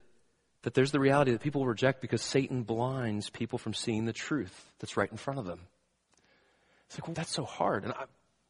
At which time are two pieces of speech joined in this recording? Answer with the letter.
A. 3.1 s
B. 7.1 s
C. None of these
B